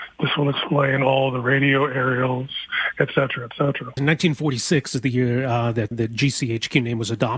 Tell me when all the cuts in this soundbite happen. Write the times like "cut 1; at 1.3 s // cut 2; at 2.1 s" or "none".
cut 1; at 4.0 s // cut 2; at 5.9 s